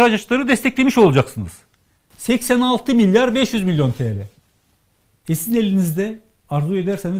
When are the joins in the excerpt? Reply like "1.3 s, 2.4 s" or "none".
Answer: 2.1 s